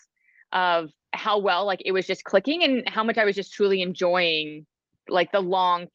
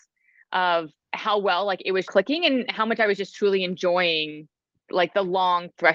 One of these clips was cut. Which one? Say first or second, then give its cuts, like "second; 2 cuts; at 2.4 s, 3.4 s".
second; 1 cut; at 2.0 s